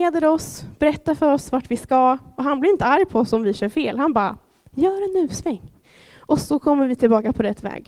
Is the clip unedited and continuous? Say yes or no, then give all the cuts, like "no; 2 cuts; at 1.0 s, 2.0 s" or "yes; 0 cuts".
yes; 0 cuts